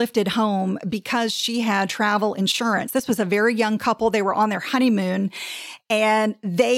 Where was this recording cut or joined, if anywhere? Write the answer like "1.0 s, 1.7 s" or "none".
none